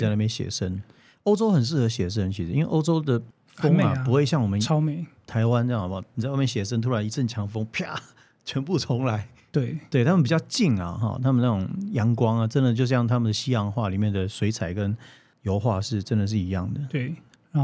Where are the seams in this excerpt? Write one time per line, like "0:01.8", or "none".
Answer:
none